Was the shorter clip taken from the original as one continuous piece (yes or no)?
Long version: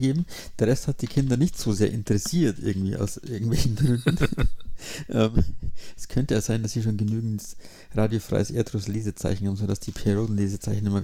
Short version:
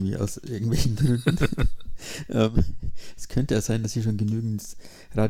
yes